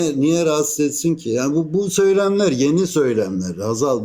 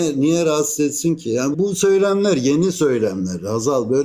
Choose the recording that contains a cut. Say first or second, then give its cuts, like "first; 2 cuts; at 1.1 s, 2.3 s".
second; 1 cut; at 1.5 s